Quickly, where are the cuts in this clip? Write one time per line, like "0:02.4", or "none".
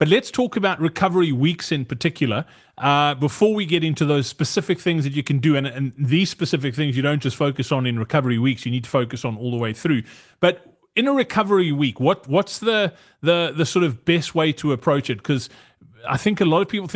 none

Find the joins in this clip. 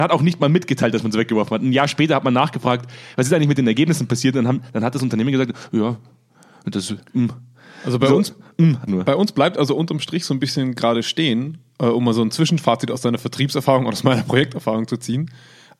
0:08.9

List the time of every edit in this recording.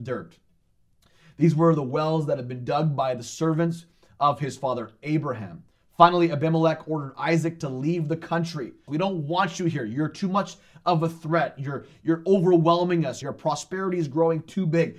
0:08.9
0:13.2

